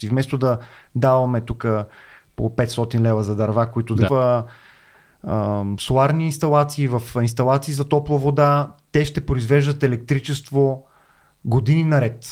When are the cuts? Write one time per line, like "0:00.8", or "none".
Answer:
0:04.1